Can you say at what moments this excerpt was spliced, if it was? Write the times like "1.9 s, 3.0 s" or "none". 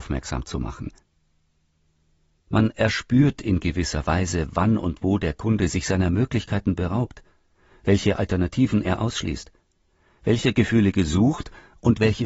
2.4 s